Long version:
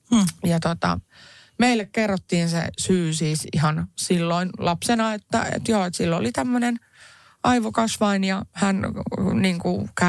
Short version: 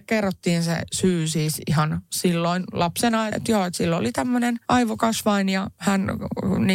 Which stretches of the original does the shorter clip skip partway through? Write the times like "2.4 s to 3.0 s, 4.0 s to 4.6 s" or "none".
5.2 s to 5.5 s, 6.8 s to 7.4 s